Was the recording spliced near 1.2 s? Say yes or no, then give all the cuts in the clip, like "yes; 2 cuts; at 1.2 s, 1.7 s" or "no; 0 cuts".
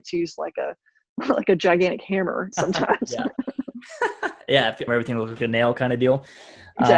no; 2 cuts; at 2.5 s, 4.9 s